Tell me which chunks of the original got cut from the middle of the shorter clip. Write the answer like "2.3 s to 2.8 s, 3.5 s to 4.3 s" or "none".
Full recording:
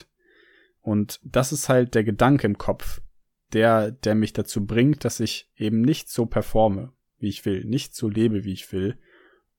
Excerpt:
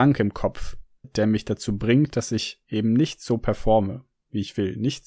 3.3 s to 3.9 s